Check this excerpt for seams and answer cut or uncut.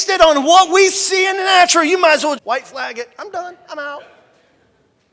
cut